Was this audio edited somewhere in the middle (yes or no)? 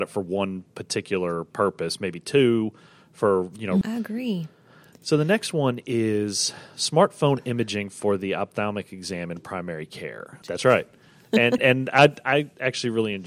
yes